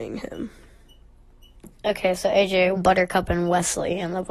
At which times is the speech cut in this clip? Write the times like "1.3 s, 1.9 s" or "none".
2.8 s